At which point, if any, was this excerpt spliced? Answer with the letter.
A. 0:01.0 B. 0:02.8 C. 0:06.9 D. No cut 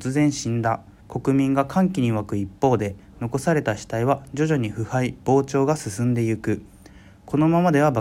A